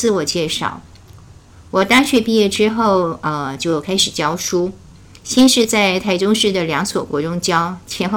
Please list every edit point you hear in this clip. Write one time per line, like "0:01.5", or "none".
none